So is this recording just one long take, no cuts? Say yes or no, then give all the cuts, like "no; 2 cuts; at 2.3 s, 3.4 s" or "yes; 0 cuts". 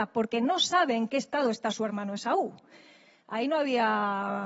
yes; 0 cuts